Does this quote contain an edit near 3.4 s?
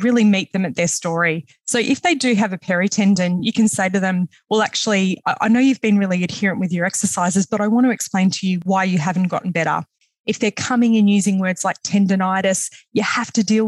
no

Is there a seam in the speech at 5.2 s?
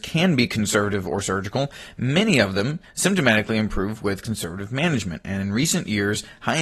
no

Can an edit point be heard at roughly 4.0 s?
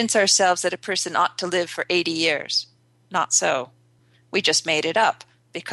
no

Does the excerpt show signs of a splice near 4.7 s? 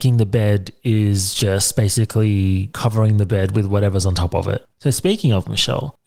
yes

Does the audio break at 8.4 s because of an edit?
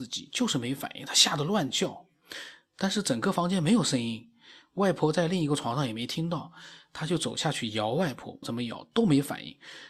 yes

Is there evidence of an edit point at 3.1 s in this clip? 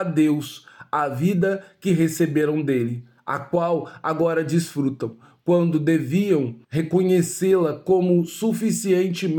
no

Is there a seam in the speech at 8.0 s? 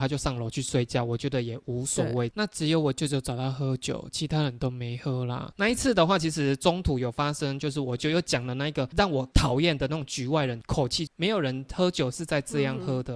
yes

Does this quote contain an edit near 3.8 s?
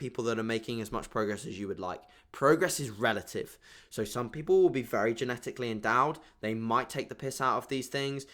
no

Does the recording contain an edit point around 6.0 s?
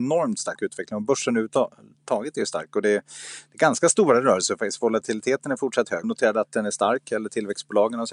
yes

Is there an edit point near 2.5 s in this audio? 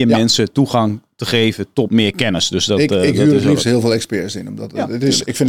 no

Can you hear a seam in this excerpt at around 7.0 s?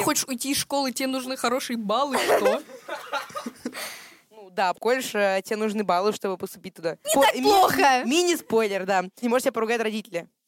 yes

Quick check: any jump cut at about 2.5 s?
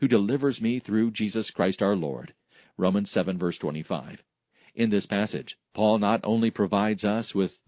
no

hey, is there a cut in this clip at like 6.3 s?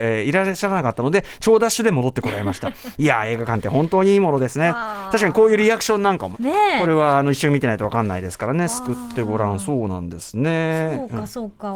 yes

